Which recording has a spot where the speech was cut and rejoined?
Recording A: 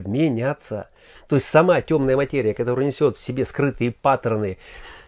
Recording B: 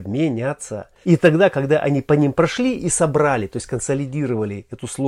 B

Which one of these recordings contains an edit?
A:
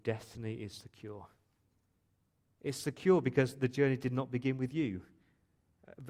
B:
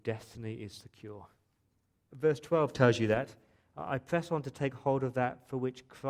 B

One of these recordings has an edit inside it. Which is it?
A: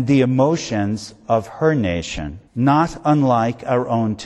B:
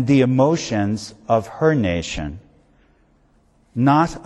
A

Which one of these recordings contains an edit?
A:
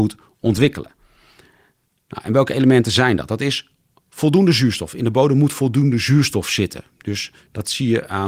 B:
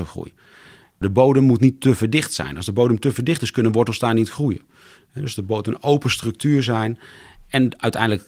B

